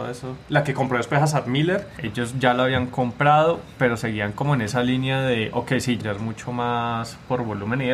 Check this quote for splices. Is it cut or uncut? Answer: cut